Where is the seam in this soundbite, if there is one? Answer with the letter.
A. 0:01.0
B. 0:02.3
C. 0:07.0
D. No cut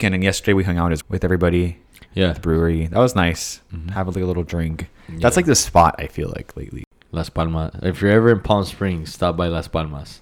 A